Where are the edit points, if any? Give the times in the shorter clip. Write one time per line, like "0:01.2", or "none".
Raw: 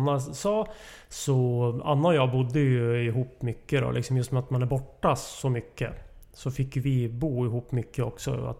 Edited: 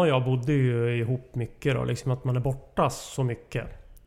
0:02.0